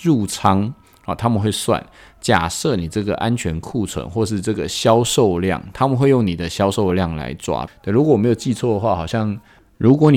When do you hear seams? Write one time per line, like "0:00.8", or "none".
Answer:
0:07.7